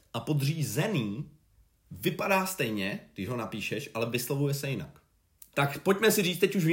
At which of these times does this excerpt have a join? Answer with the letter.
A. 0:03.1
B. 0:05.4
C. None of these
B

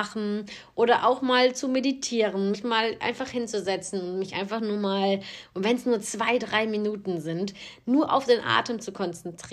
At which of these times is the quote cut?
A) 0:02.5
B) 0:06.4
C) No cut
C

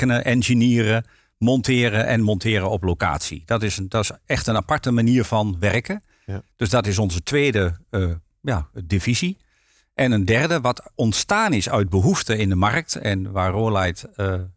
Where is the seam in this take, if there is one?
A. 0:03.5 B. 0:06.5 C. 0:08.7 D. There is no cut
C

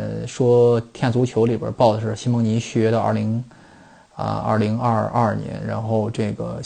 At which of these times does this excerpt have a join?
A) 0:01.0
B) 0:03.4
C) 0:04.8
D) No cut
D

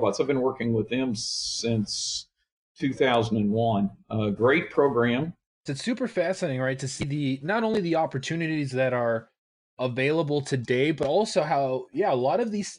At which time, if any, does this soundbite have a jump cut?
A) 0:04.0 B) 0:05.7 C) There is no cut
B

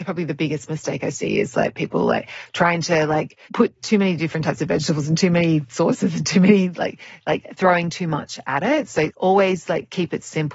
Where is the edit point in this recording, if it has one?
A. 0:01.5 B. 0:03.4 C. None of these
B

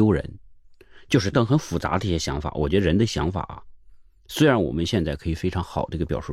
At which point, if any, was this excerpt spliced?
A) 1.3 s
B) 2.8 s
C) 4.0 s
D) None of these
A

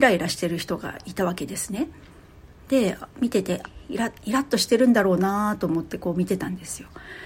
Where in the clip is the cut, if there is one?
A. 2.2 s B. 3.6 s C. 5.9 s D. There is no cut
B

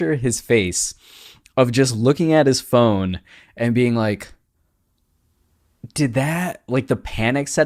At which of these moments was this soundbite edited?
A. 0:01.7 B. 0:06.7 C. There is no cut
B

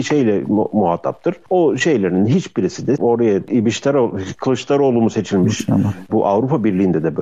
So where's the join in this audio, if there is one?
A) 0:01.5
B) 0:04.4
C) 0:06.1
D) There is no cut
C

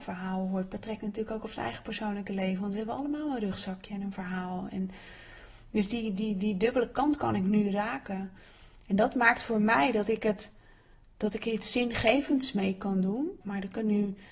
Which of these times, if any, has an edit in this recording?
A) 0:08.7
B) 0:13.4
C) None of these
B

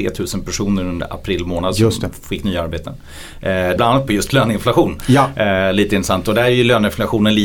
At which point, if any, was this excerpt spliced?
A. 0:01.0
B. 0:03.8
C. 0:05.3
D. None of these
B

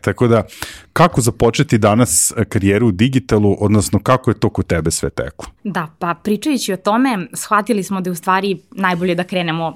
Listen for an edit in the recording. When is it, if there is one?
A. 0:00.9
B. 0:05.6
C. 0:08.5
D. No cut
B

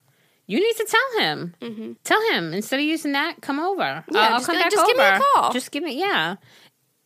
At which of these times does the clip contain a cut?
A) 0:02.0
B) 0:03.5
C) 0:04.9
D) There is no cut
A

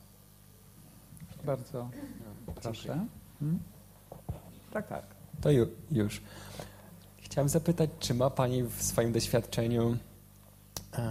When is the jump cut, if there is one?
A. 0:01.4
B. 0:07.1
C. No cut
A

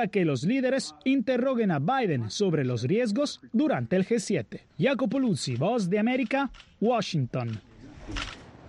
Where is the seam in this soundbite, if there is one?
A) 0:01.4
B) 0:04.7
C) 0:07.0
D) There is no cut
B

